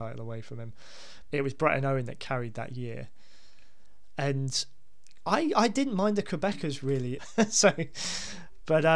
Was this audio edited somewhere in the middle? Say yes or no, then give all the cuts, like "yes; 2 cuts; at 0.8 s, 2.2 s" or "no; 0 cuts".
yes; 2 cuts; at 1.3 s, 7.2 s